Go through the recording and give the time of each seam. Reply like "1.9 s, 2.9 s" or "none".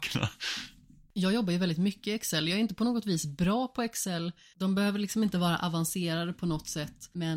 4.5 s